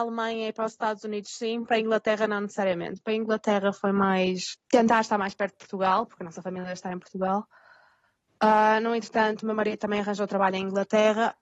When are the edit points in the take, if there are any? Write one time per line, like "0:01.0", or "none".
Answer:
none